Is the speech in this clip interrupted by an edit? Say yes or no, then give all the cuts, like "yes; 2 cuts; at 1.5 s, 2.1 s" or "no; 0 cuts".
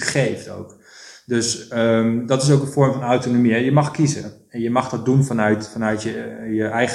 no; 0 cuts